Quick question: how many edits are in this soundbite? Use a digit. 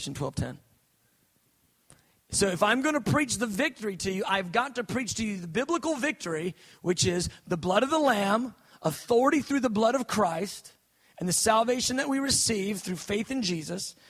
0